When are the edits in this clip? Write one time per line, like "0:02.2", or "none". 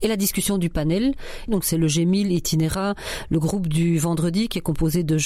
0:01.5